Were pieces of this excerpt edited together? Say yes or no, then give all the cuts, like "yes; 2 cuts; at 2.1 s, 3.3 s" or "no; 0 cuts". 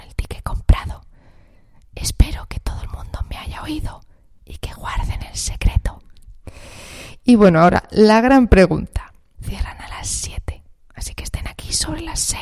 yes; 1 cut; at 9.3 s